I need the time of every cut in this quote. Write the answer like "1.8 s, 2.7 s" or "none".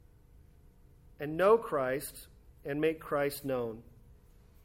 2.6 s